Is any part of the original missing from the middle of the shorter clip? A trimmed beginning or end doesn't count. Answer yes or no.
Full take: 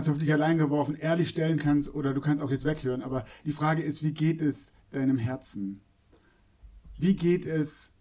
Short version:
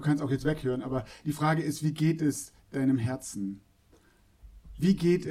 no